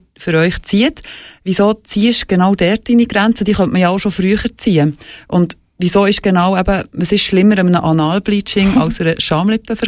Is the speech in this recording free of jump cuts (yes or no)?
yes